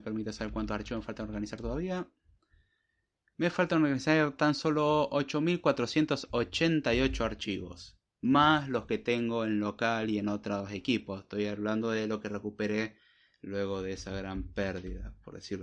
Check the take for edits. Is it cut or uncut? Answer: uncut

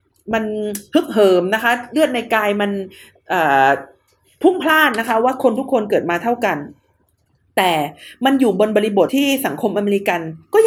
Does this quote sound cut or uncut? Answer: cut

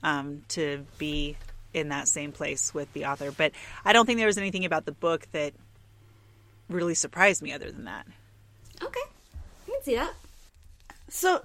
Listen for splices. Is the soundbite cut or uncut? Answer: uncut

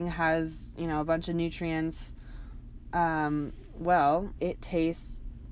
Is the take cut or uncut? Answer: cut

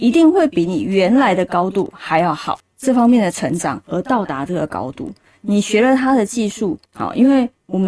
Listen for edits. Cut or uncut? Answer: cut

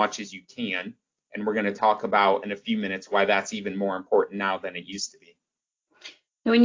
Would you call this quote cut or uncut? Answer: uncut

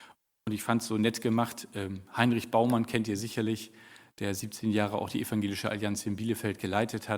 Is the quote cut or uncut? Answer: uncut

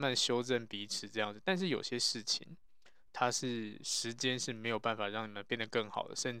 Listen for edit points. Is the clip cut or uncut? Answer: uncut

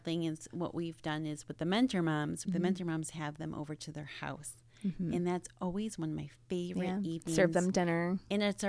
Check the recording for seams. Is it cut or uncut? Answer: cut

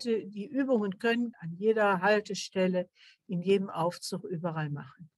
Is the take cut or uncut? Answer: cut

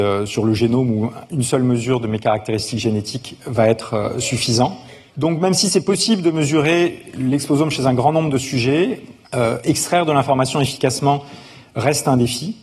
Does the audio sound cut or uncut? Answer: cut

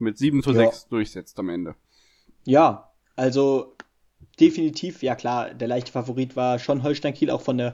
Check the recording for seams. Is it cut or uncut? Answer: uncut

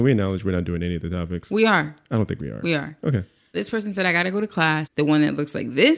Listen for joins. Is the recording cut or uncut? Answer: cut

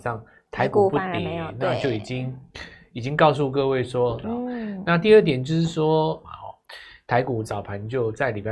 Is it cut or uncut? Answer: cut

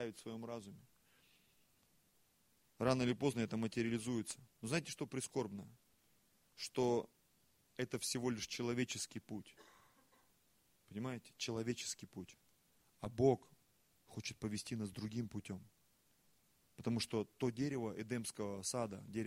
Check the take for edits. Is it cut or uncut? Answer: uncut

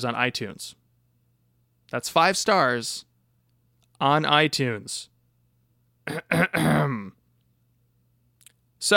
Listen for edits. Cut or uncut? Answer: uncut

